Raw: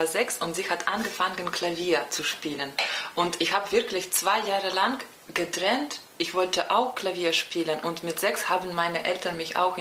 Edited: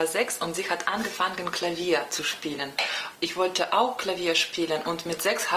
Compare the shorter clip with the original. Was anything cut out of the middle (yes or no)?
yes